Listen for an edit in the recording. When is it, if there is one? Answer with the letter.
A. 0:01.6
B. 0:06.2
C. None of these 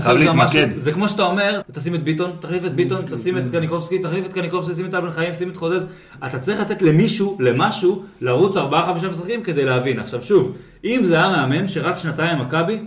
A